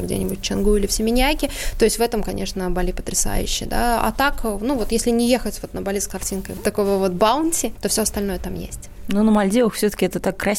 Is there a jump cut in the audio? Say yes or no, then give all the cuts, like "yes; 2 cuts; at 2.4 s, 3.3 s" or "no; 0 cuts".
no; 0 cuts